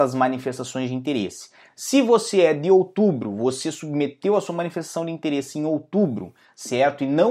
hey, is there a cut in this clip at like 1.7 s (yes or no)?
no